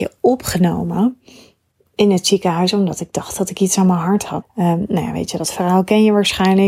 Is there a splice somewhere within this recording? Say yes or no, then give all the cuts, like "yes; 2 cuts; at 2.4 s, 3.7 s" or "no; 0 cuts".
yes; 1 cut; at 4.4 s